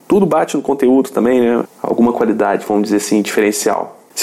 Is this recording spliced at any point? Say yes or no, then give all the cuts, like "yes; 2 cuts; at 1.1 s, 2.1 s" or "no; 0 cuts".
yes; 1 cut; at 1.6 s